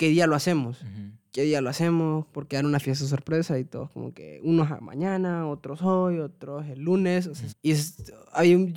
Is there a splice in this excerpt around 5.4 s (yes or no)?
no